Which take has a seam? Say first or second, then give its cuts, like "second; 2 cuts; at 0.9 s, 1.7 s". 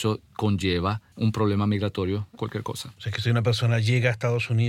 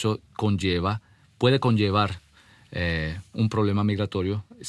first; 2 cuts; at 1.1 s, 2.4 s